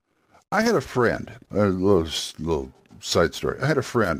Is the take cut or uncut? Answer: cut